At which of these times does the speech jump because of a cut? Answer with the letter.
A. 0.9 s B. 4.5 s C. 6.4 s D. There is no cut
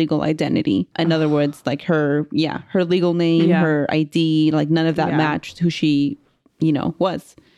A